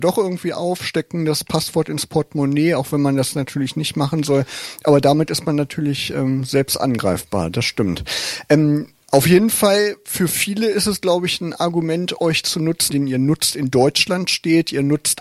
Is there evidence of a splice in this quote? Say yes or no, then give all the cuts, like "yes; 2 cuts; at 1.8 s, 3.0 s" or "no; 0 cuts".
yes; 1 cut; at 12.9 s